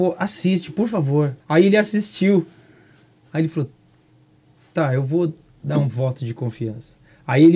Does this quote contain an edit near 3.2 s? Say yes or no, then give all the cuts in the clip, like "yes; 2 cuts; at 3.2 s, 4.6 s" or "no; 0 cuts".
no; 1 cut; at 1.4 s